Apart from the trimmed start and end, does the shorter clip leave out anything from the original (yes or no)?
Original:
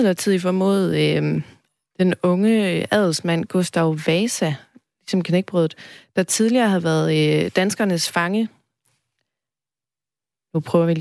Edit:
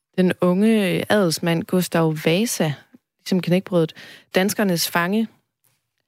yes